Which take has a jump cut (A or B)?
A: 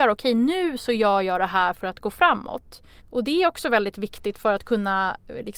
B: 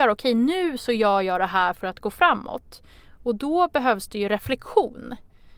A